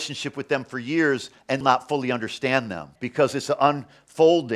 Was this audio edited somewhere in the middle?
yes; 2 cuts; at 1.6 s, 3.0 s

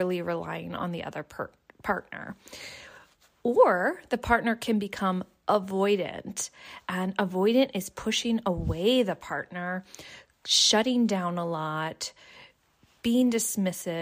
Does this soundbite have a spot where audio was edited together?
no; 0 cuts

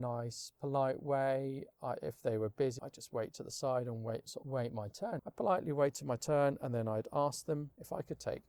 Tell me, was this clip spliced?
yes; 2 cuts; at 2.8 s, 5.2 s

